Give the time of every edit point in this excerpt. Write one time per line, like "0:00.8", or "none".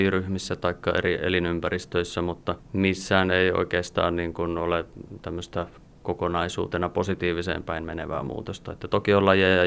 none